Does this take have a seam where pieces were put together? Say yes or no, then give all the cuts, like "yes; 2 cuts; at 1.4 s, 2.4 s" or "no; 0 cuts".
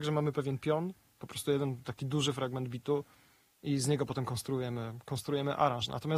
no; 0 cuts